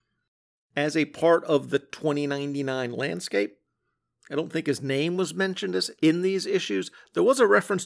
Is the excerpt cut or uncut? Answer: uncut